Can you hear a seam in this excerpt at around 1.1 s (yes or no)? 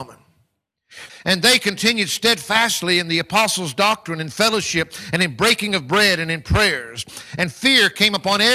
yes